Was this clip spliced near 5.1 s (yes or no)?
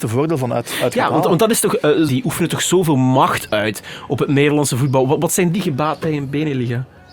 no